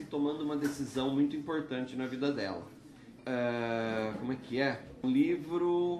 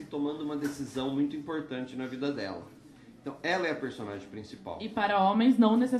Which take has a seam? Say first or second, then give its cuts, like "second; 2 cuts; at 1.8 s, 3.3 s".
first; 2 cuts; at 3.2 s, 5.0 s